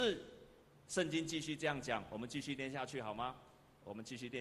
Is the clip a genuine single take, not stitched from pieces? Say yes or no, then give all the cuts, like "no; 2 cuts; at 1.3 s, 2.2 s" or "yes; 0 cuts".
yes; 0 cuts